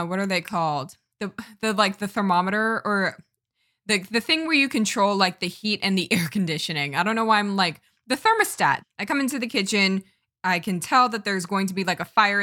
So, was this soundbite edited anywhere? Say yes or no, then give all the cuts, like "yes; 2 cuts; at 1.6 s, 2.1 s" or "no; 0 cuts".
yes; 1 cut; at 8.8 s